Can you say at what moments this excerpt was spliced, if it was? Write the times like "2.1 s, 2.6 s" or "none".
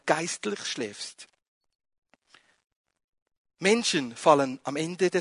none